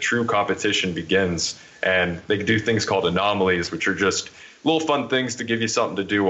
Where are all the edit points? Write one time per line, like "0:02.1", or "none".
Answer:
none